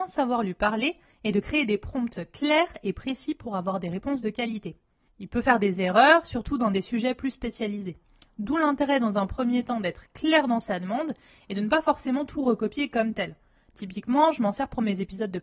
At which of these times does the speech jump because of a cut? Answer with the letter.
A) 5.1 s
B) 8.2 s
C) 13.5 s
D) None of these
A